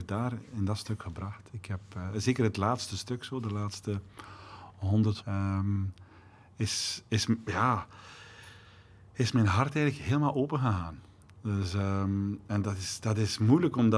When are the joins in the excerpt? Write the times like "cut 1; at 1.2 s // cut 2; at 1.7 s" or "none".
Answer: cut 1; at 5.2 s